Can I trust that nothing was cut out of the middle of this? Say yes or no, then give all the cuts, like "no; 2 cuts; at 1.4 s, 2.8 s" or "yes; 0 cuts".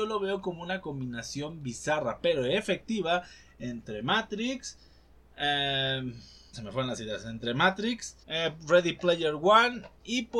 no; 2 cuts; at 6.5 s, 8.2 s